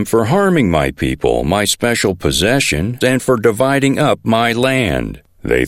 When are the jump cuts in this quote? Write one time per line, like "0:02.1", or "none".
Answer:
0:03.0